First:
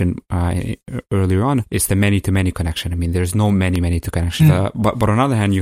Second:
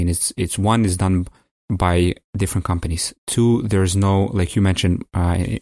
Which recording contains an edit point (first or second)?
first